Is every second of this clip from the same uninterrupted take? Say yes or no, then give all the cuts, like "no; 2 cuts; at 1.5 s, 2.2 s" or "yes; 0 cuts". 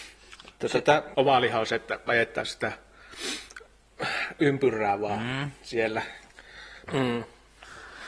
no; 2 cuts; at 1.1 s, 6.9 s